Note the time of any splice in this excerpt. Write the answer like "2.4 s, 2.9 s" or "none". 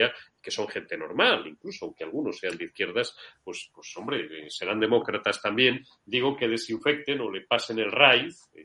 none